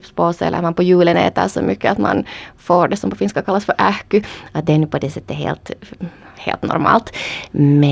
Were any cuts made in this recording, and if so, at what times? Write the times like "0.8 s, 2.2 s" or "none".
none